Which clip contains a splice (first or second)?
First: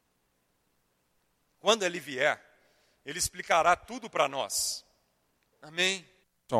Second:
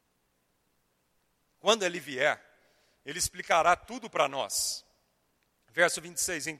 first